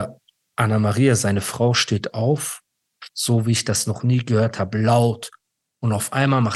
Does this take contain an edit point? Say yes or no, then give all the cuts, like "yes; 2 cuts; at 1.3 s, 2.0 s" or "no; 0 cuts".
yes; 1 cut; at 3.1 s